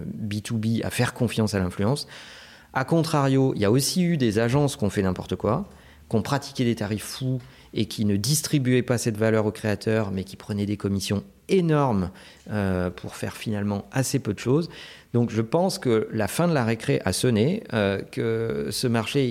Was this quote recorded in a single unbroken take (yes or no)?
yes